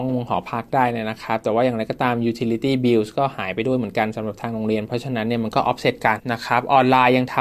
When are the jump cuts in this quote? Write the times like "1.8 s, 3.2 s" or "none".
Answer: 6.2 s

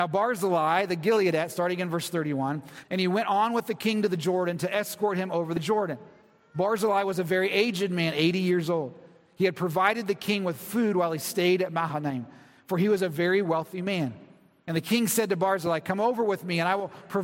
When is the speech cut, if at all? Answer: 2.8 s

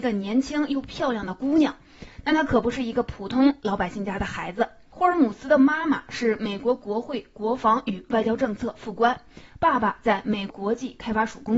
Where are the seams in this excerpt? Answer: 10.5 s

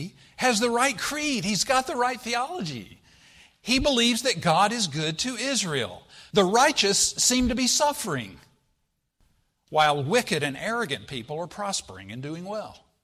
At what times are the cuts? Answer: 6.3 s

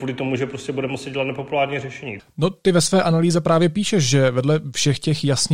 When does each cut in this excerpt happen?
2.2 s

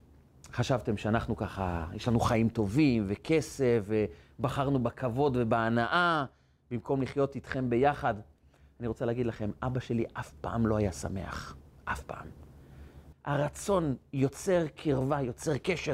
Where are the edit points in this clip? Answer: 13.1 s

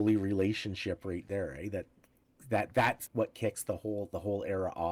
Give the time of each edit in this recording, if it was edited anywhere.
3.1 s

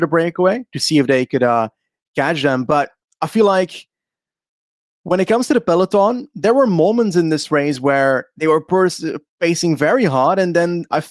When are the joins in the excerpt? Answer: none

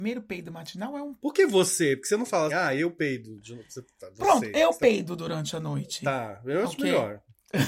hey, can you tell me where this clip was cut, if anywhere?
2.5 s

